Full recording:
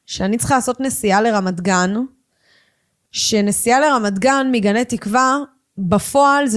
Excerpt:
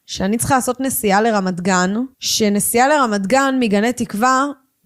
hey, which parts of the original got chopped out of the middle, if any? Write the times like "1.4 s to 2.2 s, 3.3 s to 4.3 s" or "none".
2.1 s to 3.0 s